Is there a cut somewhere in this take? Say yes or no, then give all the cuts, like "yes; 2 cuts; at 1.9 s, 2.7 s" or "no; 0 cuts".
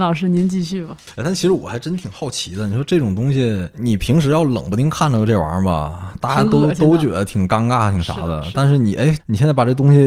no; 0 cuts